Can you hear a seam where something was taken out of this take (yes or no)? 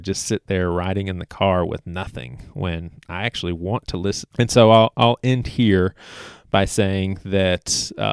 yes